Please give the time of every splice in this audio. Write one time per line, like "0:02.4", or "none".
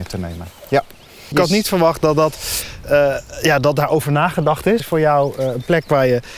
0:01.3
0:04.8